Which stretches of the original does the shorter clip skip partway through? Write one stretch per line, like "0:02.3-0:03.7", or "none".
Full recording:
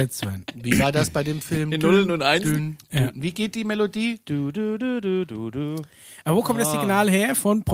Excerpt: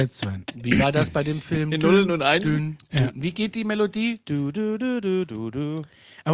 none